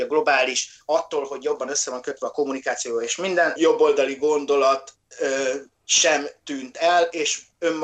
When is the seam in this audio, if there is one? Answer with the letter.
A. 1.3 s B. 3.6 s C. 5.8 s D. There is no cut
B